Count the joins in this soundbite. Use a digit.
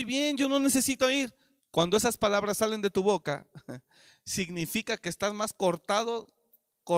1